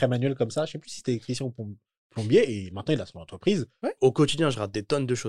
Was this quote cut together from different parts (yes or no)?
yes